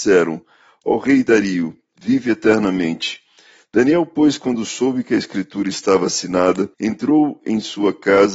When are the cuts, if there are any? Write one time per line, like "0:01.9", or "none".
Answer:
0:03.6
0:06.7